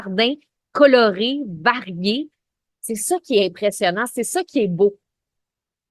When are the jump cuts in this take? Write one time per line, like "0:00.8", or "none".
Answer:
none